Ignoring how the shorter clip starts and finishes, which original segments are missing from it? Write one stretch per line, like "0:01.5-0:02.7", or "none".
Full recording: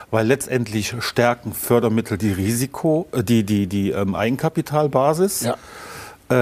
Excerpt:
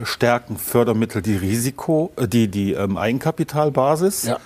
0:03.5-0:03.7